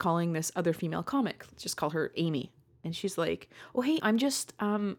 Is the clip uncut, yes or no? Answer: no